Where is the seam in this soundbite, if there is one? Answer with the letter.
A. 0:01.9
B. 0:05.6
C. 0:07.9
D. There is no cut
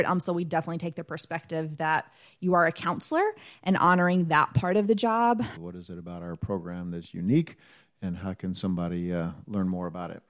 B